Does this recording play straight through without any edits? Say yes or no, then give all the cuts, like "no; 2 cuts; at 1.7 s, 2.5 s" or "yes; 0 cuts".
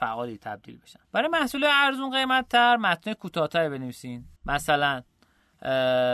no; 2 cuts; at 1.0 s, 4.4 s